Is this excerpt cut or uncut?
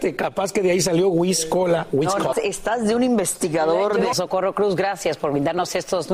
cut